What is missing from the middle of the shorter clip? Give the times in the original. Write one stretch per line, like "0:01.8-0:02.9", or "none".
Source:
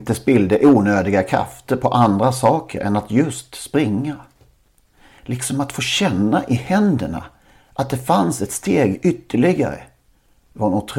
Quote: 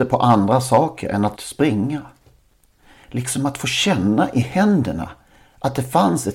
0:03.1-0:03.5